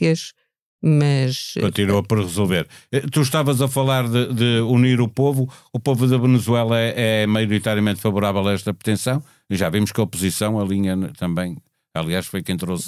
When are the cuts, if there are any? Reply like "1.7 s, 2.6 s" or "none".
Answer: none